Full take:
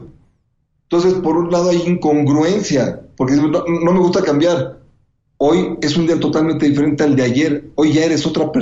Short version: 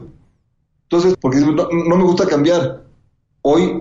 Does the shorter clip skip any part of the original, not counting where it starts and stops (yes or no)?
yes